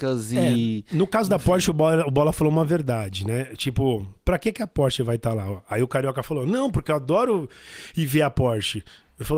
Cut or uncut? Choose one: uncut